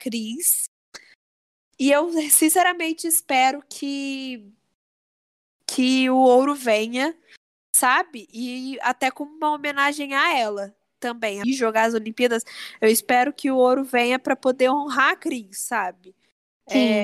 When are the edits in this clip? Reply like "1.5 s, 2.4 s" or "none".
11.4 s